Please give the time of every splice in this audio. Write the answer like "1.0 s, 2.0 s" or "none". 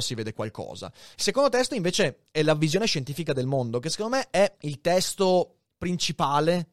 1.1 s, 4.5 s